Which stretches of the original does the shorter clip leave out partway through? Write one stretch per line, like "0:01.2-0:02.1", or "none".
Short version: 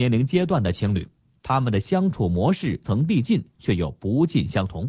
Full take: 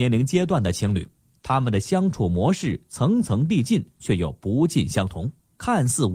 0:02.8-0:03.2